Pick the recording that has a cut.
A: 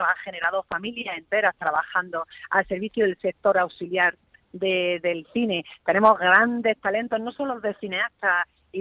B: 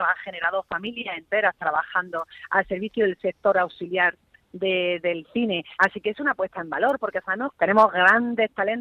B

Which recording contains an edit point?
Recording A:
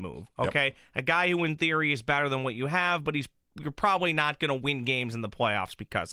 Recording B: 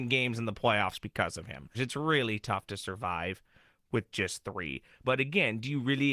B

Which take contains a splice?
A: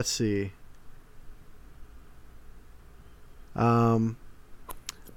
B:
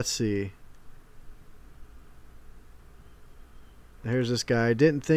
A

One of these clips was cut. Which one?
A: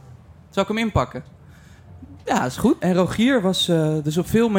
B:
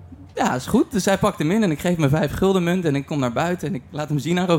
A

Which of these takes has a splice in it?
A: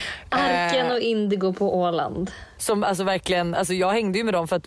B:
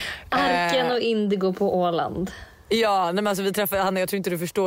A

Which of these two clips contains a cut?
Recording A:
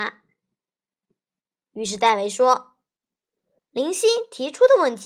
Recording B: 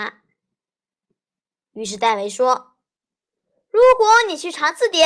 A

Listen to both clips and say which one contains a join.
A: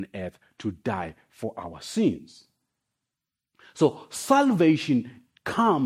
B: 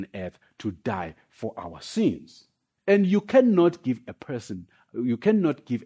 B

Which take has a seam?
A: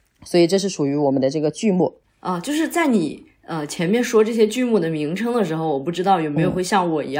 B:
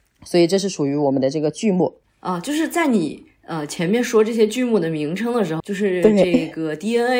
B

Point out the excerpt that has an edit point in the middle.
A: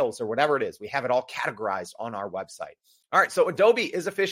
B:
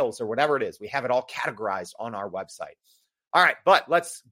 A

